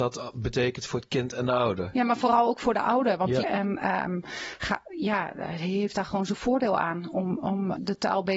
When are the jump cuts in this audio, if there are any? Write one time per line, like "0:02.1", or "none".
0:03.4